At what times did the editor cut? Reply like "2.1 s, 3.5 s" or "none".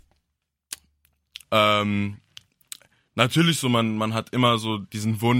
1.4 s